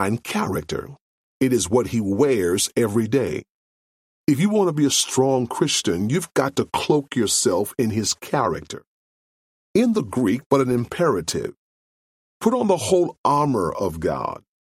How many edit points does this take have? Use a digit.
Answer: 1